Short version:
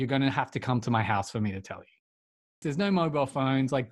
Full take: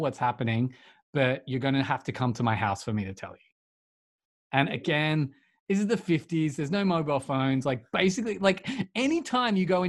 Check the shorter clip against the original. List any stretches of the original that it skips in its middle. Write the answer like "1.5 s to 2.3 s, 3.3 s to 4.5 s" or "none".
4.1 s to 6.6 s